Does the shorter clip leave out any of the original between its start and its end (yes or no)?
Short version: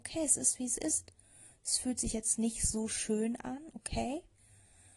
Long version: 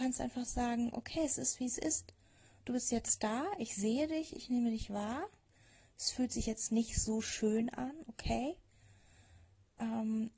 yes